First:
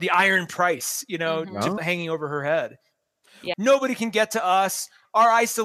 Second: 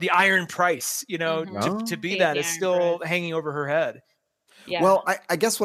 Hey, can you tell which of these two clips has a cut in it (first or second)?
first